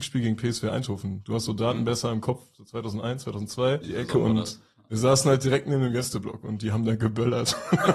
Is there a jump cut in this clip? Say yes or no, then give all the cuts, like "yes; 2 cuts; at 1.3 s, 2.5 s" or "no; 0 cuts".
yes; 1 cut; at 3.8 s